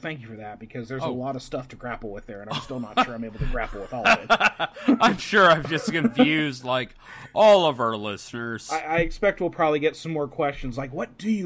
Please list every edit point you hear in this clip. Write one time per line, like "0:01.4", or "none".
none